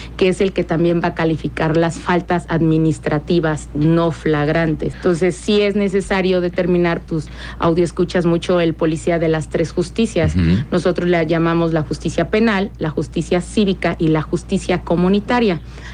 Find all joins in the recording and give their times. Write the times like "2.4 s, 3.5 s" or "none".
4.9 s, 7.1 s